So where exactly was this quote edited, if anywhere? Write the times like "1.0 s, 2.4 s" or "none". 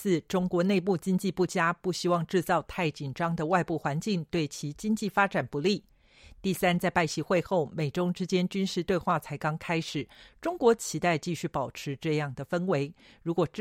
none